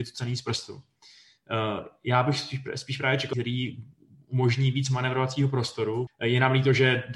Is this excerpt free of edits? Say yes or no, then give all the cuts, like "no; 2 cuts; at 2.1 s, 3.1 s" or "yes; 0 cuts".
no; 2 cuts; at 3.3 s, 6.1 s